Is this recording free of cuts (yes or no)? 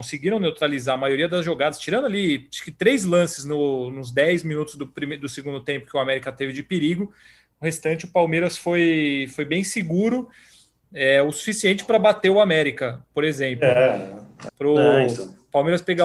no